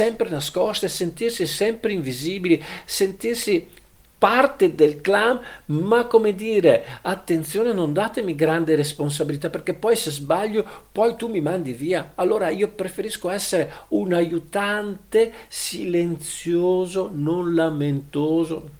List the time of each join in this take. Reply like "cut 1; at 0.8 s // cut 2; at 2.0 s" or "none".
none